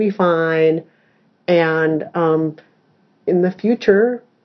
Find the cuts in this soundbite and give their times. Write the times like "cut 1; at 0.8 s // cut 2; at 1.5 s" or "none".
none